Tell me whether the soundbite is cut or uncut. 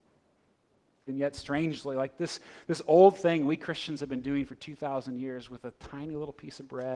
cut